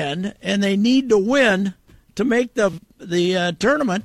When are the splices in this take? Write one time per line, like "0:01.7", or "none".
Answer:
0:02.9